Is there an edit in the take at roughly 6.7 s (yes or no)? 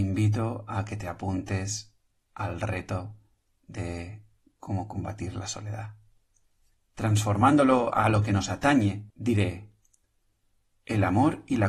yes